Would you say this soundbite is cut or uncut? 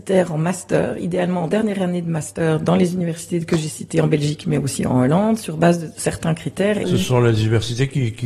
cut